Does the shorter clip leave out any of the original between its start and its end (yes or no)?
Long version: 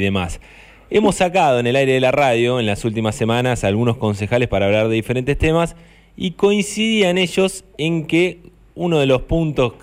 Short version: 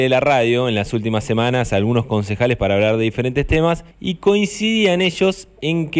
yes